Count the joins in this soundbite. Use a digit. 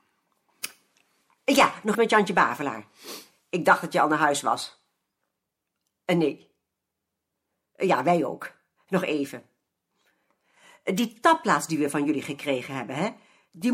1